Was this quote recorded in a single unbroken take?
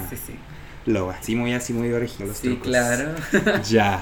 no; 1 cut; at 1.2 s

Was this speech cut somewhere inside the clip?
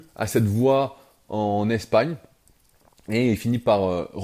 no; 0 cuts

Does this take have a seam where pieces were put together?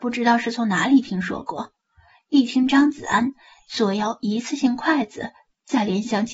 no; 0 cuts

